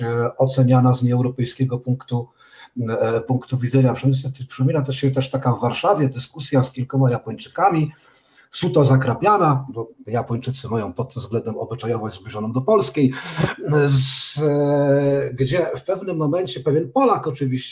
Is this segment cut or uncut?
uncut